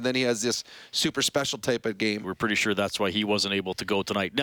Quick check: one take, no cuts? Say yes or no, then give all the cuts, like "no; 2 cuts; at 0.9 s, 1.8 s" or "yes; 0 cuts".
no; 1 cut; at 2.2 s